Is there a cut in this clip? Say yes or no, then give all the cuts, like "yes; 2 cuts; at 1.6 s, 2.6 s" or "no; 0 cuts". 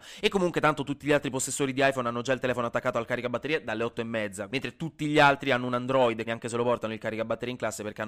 yes; 2 cuts; at 4.5 s, 6.3 s